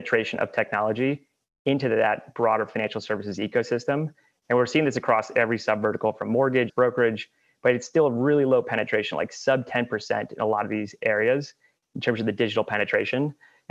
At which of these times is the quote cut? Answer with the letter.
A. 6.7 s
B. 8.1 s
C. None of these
A